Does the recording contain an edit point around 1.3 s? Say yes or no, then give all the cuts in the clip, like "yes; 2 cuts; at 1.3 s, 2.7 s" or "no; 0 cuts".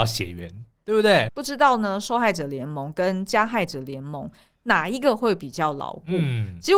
yes; 1 cut; at 1.3 s